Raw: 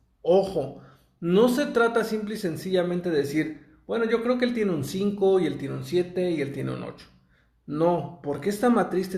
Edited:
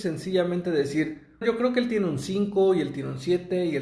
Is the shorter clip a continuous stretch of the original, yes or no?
no